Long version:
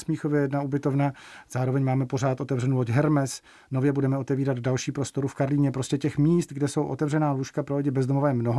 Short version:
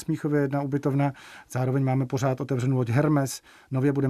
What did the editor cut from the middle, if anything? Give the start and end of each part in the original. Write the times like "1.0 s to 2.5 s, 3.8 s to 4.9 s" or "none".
none